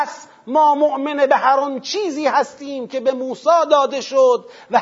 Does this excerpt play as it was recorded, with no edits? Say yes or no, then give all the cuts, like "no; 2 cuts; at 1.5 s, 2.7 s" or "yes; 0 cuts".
yes; 0 cuts